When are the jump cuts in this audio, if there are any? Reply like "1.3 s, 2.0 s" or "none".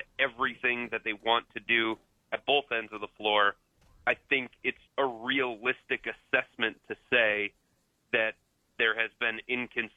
4.9 s

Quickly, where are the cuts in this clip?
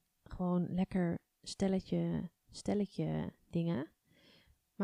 none

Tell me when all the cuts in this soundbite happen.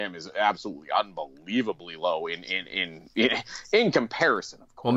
none

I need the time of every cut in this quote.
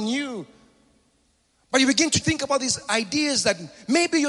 2.2 s

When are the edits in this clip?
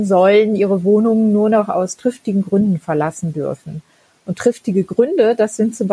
none

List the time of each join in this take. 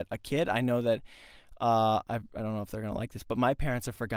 none

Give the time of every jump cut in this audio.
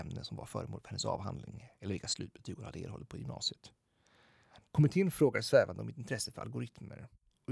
4.7 s

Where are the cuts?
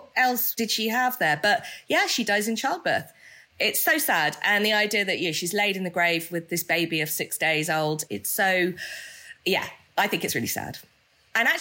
none

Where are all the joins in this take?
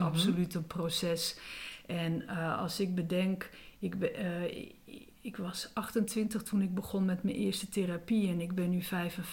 none

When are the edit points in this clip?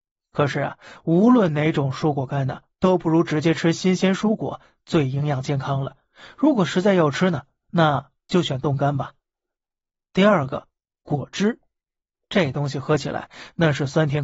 none

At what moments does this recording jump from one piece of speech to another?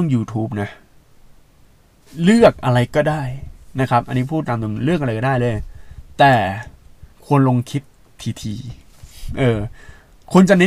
7.1 s

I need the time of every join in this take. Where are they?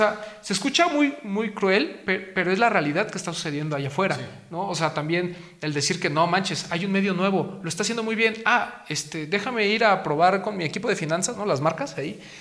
none

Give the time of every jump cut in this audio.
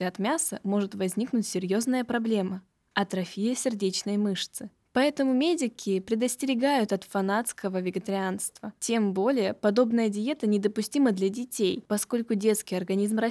none

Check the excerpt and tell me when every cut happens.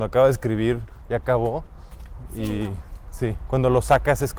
3.5 s

